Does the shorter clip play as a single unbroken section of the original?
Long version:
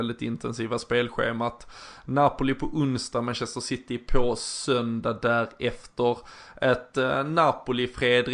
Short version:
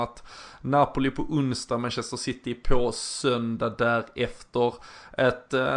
yes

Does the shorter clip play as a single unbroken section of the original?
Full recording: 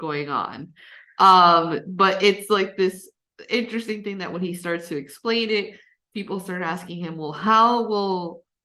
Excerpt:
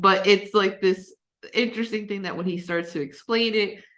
yes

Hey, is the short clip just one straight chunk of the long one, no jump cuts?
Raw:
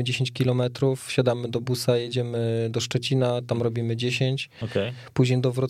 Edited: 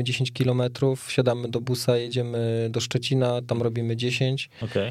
yes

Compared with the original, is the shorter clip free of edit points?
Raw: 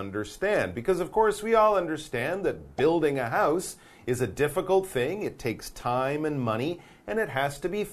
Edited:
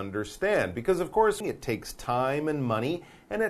no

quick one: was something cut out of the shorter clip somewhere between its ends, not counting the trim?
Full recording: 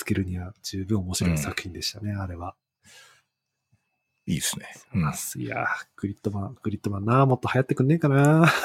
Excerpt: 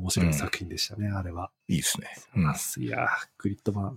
yes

